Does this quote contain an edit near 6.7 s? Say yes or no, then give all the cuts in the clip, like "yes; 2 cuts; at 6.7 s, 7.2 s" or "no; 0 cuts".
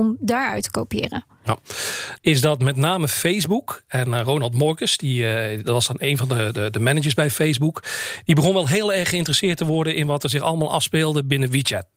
no; 1 cut; at 2.2 s